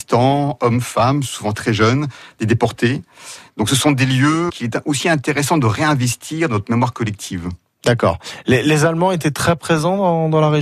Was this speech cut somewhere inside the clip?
yes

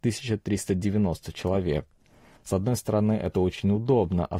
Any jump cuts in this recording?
yes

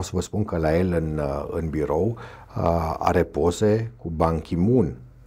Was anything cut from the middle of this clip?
no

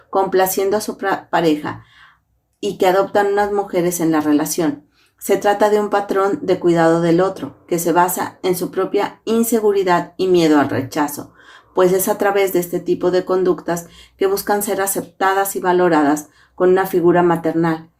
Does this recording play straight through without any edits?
yes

